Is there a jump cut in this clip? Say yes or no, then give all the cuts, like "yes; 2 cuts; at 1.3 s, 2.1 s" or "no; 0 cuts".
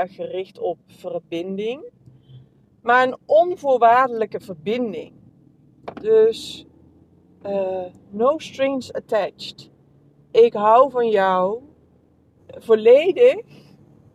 yes; 1 cut; at 12.4 s